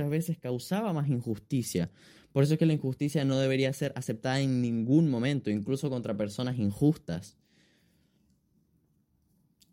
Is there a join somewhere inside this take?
no; 0 cuts

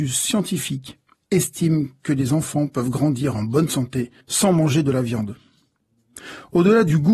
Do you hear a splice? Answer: yes; 1 cut; at 4.2 s

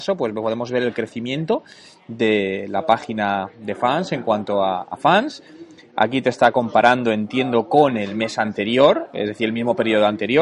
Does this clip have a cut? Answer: no; 0 cuts

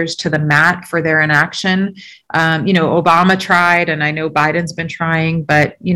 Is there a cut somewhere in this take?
no; 0 cuts

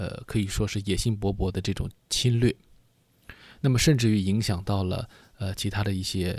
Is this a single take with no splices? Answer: yes; 0 cuts

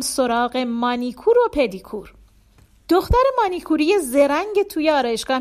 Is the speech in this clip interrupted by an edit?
no; 0 cuts

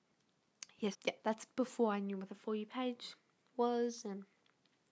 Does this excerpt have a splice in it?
yes; 1 cut; at 0.9 s

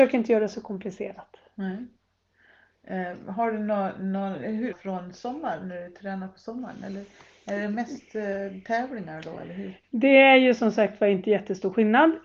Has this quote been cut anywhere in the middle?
yes; 1 cut; at 4.7 s

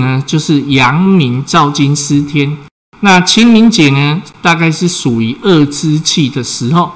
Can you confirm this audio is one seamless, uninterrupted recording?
no; 1 cut; at 2.9 s

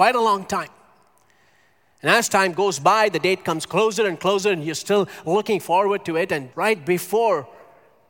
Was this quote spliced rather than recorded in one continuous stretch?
yes; 1 cut; at 6.5 s

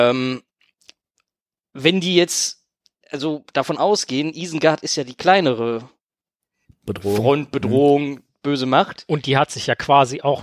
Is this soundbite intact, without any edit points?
yes; 0 cuts

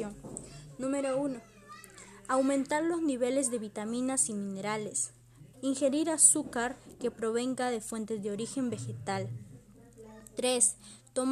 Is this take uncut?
no; 1 cut; at 5.5 s

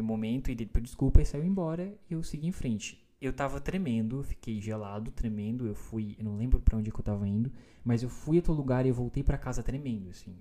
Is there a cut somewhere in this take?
no; 0 cuts

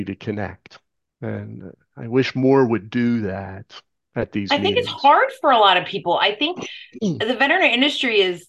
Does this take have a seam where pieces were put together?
no; 0 cuts

